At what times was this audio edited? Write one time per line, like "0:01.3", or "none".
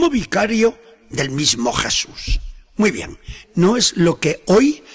0:03.4